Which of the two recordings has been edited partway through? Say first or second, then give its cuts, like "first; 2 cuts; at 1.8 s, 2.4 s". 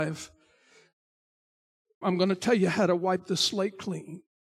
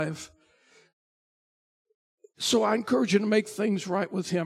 first; 1 cut; at 2.0 s